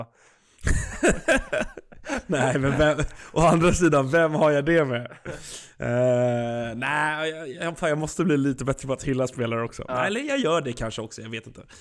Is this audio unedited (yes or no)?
yes